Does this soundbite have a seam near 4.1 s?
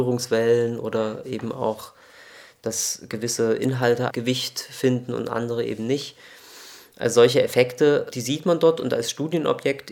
yes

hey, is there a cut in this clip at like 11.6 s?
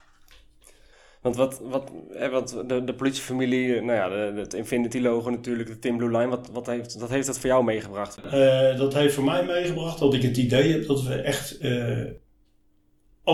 no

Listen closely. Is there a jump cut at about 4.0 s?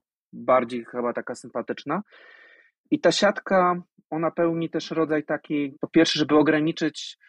no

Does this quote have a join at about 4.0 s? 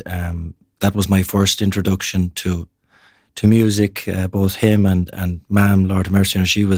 no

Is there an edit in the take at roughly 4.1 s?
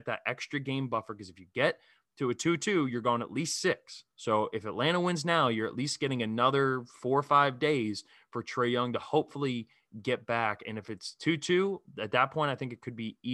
yes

